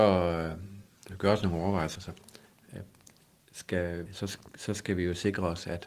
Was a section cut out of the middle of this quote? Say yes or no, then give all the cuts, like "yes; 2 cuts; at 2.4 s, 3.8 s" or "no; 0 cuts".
yes; 2 cuts; at 1.9 s, 4.1 s